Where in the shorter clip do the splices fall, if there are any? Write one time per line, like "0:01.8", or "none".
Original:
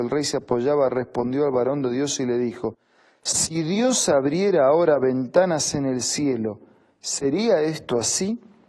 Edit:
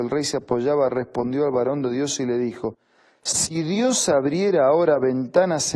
none

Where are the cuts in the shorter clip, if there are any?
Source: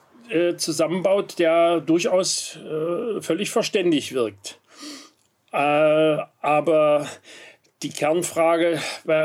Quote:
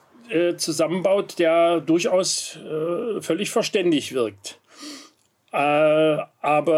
none

